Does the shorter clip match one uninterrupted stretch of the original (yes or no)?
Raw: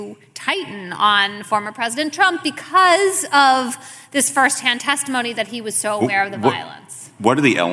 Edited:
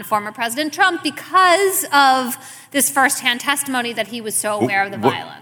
yes